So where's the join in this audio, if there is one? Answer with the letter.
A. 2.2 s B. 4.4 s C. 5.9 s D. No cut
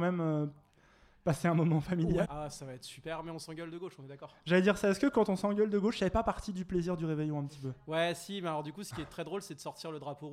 A